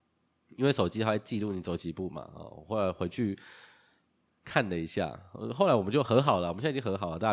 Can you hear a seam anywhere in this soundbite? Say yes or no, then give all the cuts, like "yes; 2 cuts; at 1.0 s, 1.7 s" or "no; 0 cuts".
no; 0 cuts